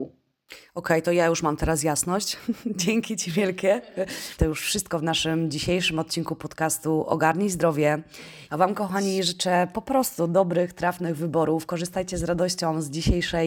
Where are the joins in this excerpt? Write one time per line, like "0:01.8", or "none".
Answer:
0:04.4
0:08.5